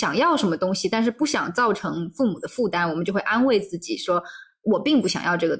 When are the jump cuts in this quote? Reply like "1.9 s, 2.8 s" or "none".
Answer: none